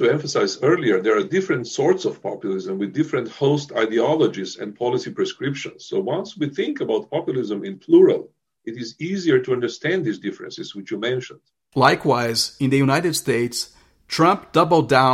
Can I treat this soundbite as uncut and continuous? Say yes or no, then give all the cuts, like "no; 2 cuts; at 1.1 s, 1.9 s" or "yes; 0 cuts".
no; 2 cuts; at 8.6 s, 11.7 s